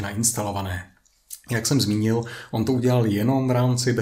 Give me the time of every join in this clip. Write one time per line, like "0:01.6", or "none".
none